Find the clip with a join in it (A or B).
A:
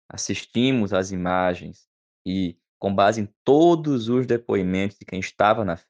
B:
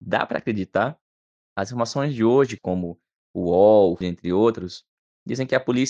B